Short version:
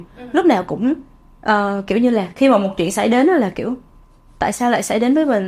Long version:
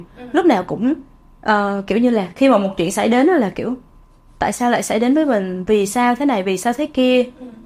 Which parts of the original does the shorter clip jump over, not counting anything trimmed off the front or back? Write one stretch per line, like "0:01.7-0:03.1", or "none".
none